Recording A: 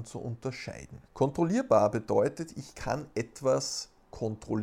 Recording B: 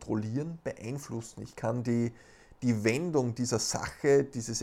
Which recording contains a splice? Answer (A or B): A